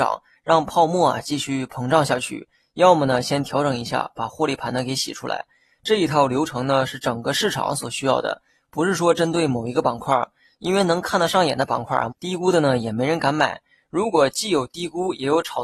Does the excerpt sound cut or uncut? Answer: cut